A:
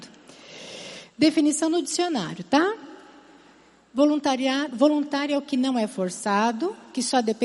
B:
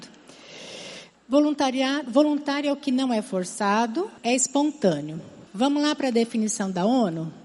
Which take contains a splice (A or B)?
B